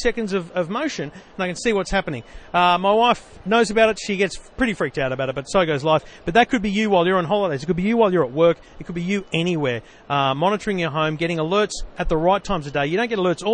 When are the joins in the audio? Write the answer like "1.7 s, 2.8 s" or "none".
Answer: none